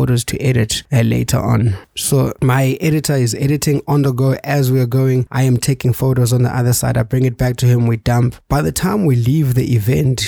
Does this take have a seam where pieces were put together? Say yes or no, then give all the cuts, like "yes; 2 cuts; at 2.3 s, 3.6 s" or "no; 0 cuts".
no; 0 cuts